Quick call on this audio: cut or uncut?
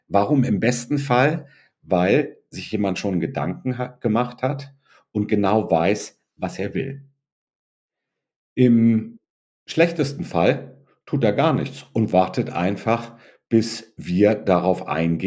uncut